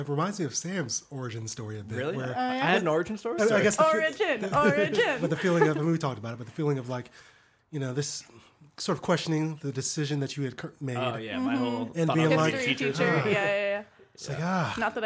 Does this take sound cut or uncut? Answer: cut